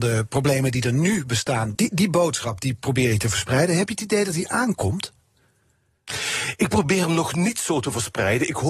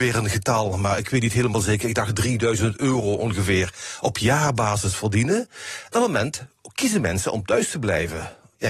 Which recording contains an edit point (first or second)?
first